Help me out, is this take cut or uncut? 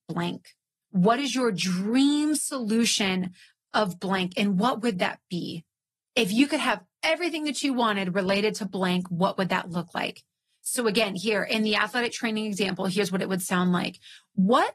uncut